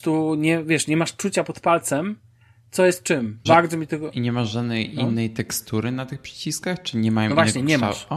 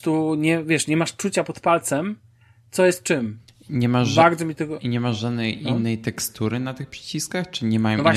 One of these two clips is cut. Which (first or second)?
first